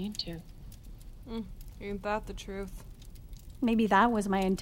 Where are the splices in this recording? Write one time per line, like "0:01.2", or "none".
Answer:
none